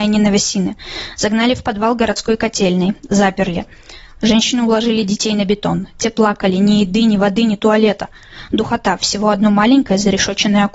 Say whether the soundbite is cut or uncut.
uncut